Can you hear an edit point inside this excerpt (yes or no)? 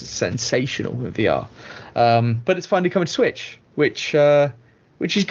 no